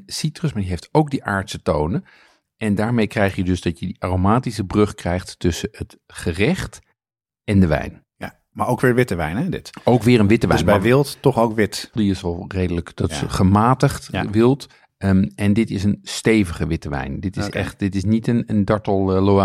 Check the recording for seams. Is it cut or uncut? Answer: cut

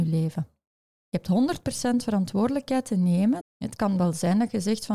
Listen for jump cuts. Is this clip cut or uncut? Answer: cut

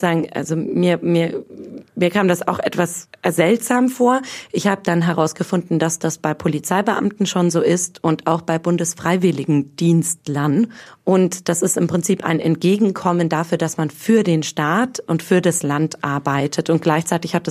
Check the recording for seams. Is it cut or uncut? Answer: uncut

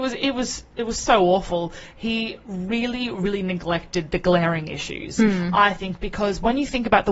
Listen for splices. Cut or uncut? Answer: uncut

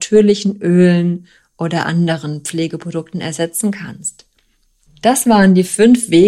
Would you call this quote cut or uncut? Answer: cut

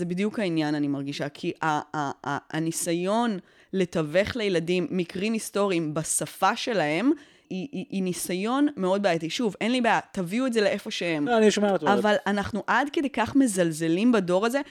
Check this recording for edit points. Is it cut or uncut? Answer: cut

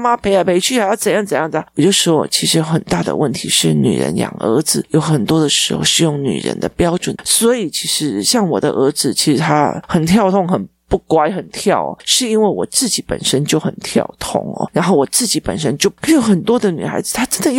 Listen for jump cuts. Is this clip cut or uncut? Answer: cut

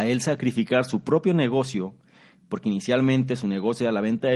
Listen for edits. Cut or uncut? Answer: uncut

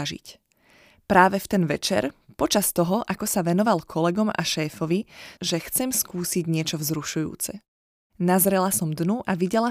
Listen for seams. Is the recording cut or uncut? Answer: cut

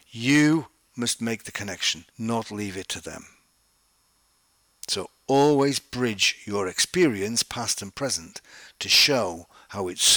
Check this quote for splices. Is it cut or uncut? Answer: cut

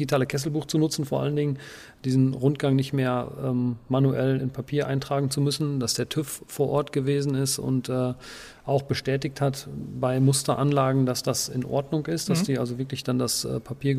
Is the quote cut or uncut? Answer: uncut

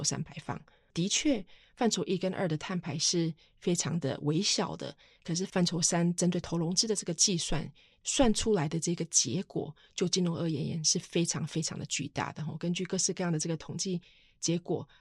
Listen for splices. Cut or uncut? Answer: cut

